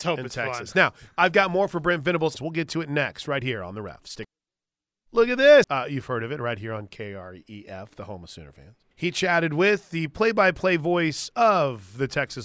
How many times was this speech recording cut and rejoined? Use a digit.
3